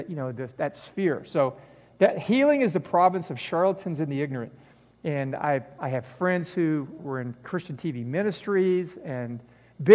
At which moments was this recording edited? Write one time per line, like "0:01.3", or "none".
0:04.9
0:07.0